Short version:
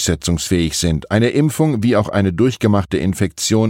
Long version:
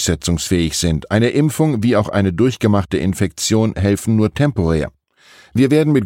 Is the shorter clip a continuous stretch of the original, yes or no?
yes